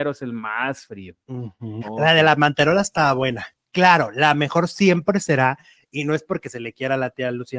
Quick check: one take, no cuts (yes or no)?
no